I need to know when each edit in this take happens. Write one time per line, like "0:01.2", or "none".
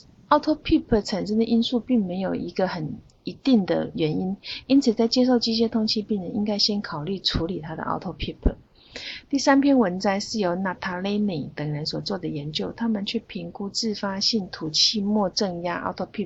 0:09.2